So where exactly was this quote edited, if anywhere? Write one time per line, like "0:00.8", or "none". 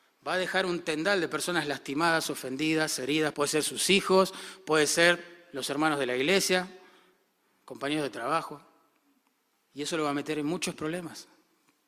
0:03.3
0:09.5